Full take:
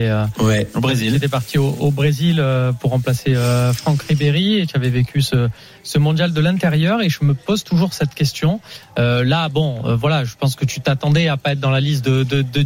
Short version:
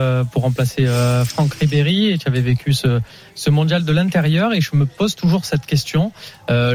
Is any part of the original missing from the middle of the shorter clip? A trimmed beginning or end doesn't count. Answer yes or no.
no